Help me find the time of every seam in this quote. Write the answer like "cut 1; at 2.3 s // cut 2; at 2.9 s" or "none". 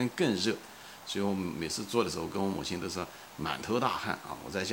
none